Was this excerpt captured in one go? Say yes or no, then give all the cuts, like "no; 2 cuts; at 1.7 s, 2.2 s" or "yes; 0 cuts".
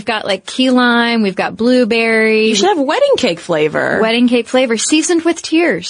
yes; 0 cuts